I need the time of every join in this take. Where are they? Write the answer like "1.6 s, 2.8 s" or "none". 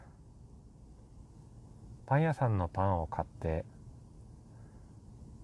2.0 s